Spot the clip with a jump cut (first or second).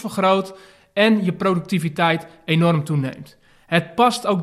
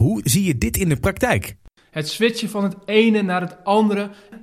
second